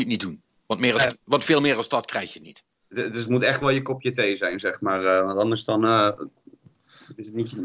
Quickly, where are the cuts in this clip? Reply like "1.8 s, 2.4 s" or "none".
none